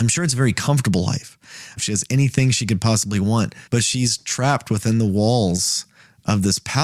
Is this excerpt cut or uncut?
cut